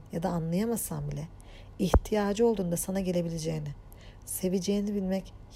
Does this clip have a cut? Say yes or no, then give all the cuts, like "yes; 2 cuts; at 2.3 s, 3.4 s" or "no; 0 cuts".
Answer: yes; 1 cut; at 4.2 s